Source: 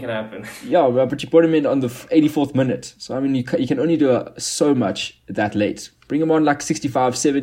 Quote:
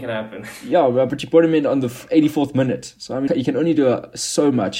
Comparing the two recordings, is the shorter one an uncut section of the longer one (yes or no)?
no